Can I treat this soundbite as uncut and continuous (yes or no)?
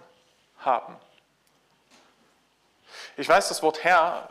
yes